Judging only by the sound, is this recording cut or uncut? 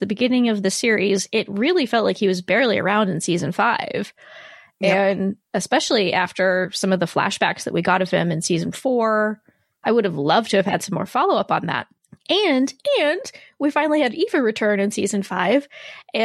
uncut